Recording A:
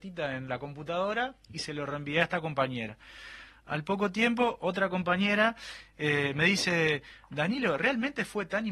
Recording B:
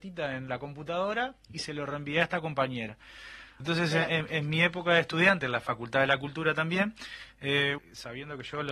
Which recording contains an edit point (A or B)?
B